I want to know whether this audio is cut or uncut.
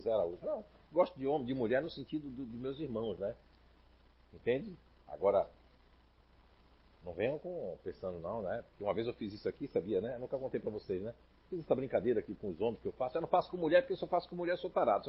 uncut